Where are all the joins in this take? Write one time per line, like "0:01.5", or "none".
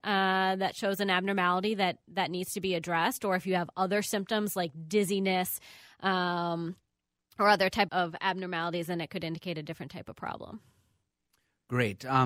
0:07.9